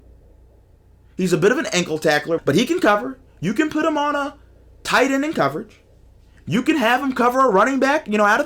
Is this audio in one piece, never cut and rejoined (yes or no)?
no